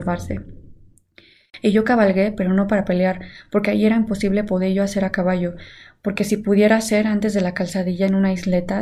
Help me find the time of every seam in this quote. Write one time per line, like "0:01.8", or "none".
none

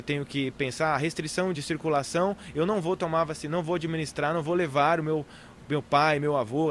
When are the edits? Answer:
0:01.5

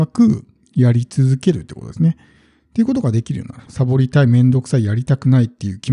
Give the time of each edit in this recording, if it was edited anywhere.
0:03.7

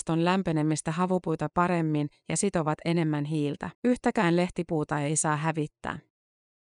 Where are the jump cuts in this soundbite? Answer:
0:03.7

